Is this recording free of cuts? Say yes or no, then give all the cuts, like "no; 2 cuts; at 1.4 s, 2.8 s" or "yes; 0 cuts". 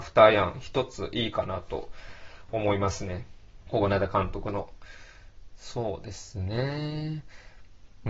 no; 1 cut; at 3.6 s